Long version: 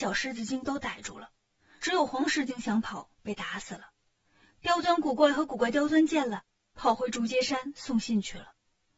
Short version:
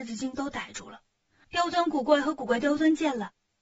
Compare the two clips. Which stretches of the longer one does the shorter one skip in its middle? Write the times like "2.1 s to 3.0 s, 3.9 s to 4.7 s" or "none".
1.7 s to 4.6 s

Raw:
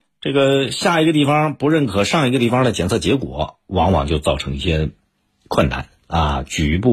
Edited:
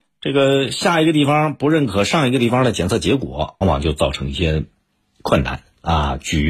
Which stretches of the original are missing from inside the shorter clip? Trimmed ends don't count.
3.6 s to 3.9 s

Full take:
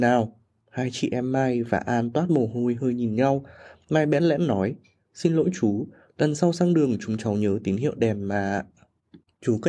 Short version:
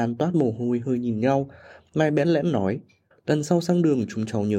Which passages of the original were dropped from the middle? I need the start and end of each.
5.1 s to 6.0 s

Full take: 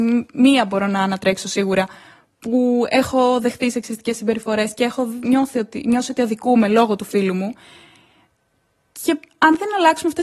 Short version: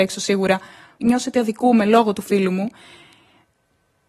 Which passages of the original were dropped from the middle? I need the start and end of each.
2.3 s to 5.8 s

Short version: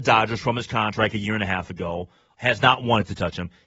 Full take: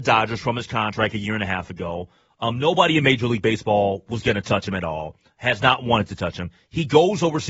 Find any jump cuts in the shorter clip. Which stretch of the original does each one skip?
2.3 s to 5.4 s

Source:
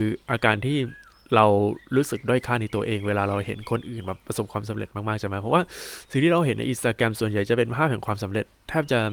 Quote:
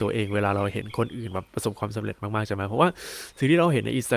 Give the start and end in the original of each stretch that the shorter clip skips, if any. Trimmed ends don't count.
none

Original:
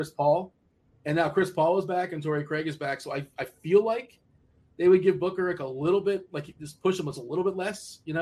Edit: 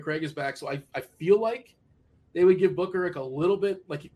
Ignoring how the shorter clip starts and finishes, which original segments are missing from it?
none

